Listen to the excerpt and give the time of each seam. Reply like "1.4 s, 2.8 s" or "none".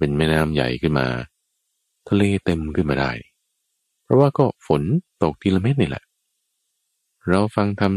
5.1 s